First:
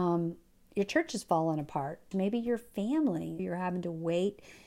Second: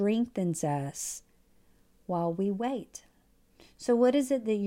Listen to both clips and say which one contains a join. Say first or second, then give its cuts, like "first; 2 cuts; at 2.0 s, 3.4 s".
first; 2 cuts; at 2.1 s, 3.4 s